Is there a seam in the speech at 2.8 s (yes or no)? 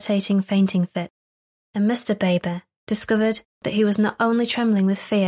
yes